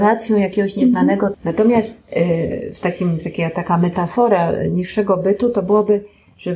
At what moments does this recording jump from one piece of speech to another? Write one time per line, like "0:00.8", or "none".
0:01.3